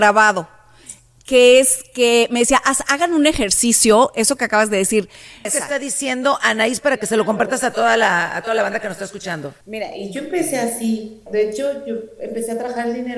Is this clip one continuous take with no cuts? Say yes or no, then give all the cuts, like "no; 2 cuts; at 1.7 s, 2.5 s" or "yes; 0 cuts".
no; 3 cuts; at 5.4 s, 9.6 s, 11.3 s